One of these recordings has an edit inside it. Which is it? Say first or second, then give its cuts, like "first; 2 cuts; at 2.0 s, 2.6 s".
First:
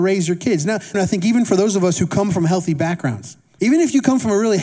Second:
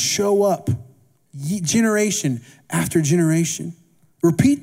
first; 2 cuts; at 0.9 s, 3.6 s